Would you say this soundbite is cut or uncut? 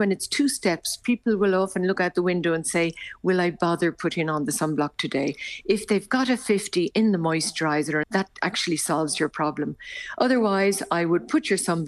cut